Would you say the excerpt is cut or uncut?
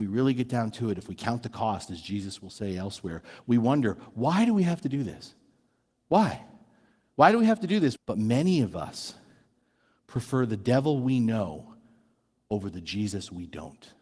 cut